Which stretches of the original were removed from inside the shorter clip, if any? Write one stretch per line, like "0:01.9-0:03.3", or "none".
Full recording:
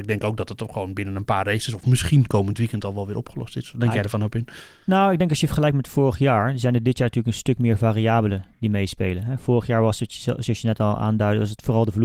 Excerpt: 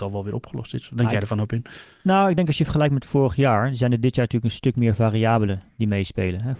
none